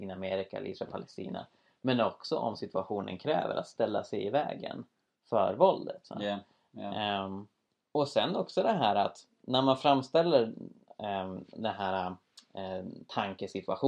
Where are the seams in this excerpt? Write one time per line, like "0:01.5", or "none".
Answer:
none